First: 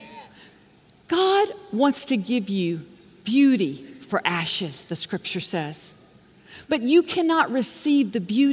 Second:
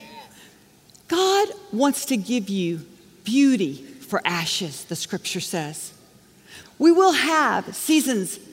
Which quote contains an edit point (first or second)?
second